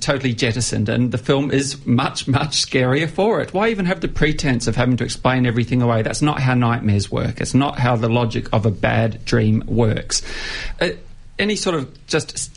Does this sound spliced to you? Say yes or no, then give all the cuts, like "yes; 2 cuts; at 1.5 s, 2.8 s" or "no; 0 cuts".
yes; 1 cut; at 10.7 s